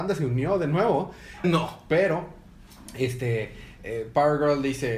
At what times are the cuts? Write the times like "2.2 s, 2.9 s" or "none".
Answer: 1.4 s